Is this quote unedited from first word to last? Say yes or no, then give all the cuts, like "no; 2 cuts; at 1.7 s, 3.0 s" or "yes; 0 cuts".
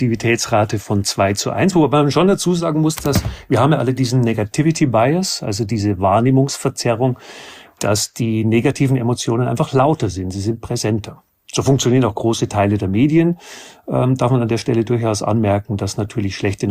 yes; 0 cuts